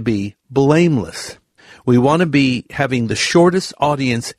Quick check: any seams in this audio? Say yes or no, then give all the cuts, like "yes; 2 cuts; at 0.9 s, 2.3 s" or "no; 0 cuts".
no; 0 cuts